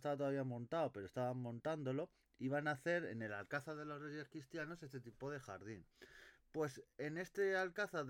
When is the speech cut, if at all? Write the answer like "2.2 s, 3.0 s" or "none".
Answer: none